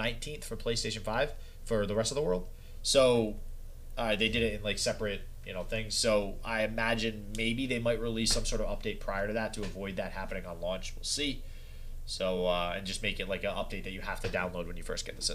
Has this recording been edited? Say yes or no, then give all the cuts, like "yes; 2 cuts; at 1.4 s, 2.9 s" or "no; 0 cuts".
no; 0 cuts